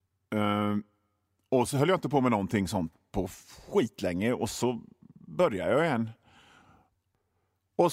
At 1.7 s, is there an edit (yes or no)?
yes